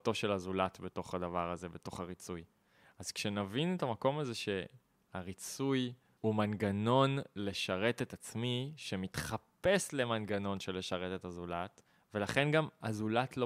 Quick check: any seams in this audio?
no; 0 cuts

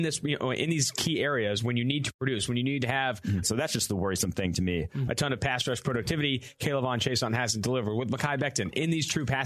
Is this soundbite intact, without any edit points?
no; 2 cuts; at 3.4 s, 5.1 s

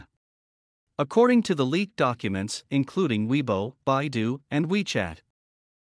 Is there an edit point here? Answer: yes; 1 cut; at 2.7 s

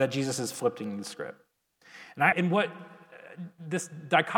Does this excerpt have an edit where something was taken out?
yes; 1 cut; at 2.3 s

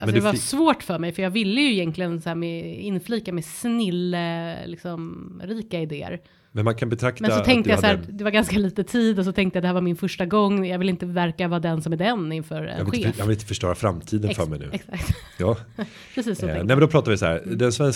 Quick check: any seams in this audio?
no; 0 cuts

